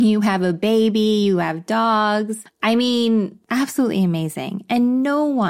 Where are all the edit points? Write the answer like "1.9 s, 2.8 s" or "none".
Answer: 3.4 s